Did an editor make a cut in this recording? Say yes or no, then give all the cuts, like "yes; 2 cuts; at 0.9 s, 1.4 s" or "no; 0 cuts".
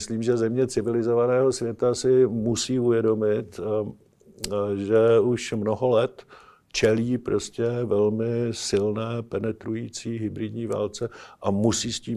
no; 0 cuts